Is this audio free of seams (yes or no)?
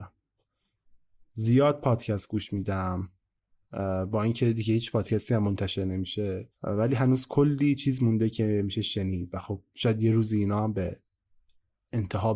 no